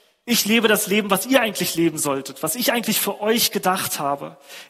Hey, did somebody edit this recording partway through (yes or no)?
no